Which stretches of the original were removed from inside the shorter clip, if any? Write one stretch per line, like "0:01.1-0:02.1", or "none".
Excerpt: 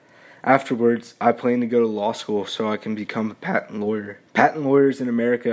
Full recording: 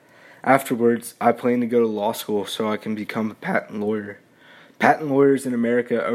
0:04.3-0:04.7